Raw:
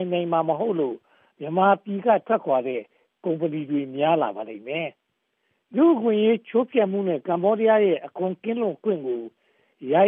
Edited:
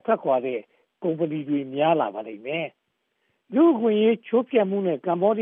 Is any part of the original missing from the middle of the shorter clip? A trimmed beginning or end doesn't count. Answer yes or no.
no